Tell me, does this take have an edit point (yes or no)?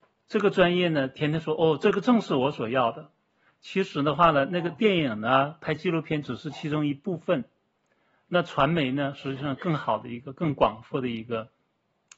no